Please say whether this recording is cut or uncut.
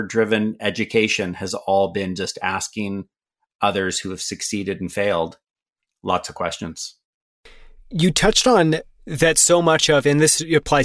uncut